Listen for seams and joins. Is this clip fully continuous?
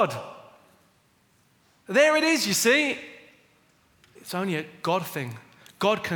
no; 1 cut; at 4.2 s

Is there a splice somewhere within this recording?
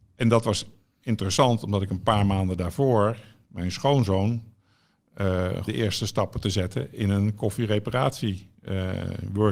yes; 1 cut; at 5.7 s

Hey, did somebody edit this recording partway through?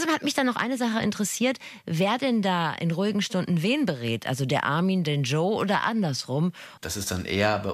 yes; 1 cut; at 6.8 s

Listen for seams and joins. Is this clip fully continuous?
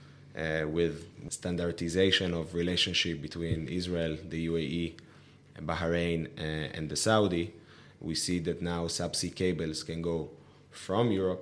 yes; 0 cuts

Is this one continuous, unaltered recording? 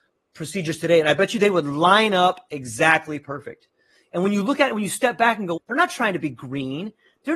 no; 1 cut; at 5.6 s

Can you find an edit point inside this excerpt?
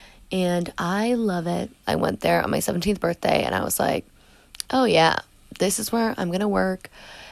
yes; 1 cut; at 1.8 s

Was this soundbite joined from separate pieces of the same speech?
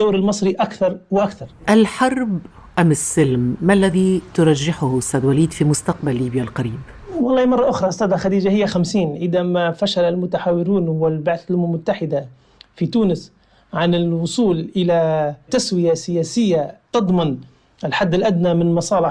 yes; 1 cut; at 8.7 s

